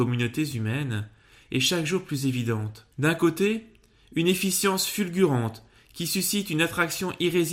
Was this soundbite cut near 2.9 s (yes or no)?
yes